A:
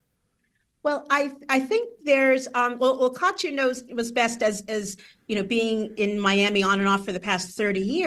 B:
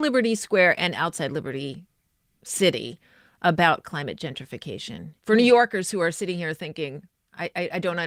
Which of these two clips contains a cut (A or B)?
B